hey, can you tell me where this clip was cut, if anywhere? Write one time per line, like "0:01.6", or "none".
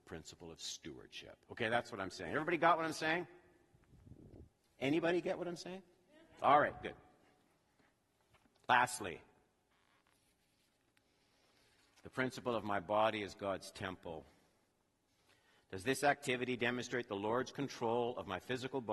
none